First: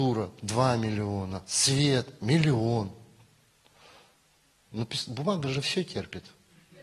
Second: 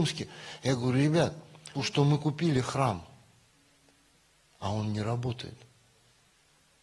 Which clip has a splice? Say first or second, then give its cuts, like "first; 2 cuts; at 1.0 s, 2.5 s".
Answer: second; 1 cut; at 1.8 s